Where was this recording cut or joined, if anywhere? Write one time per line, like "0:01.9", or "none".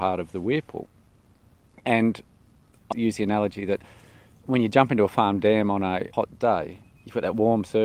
0:02.9